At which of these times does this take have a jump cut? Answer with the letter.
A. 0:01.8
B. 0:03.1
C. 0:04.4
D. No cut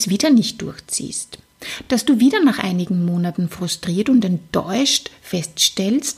D